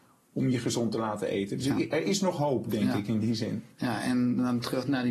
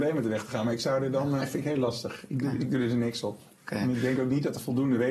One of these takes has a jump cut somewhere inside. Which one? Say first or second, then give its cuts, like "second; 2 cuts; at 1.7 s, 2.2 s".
second; 1 cut; at 1.4 s